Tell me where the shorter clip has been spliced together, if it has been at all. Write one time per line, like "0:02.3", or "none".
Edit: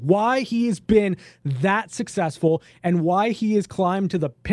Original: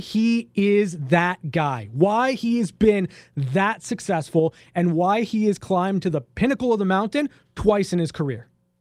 none